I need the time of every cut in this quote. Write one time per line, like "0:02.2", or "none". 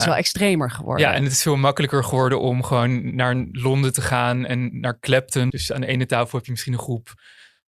0:05.5